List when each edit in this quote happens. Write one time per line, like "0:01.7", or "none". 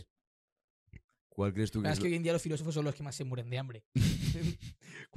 0:01.2